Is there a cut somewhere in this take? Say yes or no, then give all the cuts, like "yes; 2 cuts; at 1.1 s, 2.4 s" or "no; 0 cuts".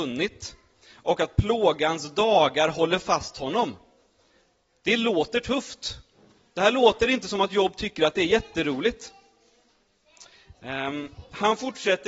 no; 0 cuts